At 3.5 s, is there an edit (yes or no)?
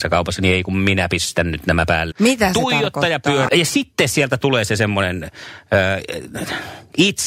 yes